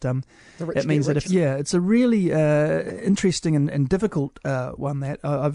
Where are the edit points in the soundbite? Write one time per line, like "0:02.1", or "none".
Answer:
0:01.2